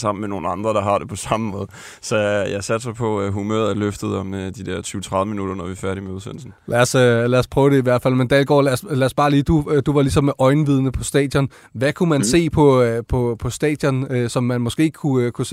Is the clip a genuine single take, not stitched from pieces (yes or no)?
no